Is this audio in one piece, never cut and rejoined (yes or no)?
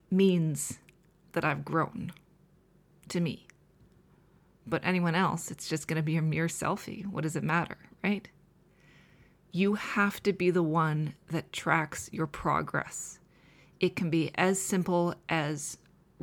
yes